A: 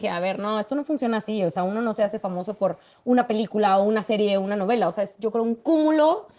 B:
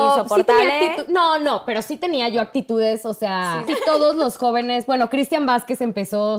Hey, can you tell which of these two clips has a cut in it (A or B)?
B